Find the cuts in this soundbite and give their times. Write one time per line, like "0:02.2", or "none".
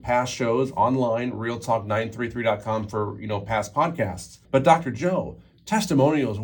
0:04.4